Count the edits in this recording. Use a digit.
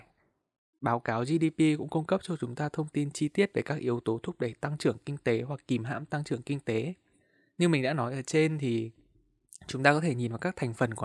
0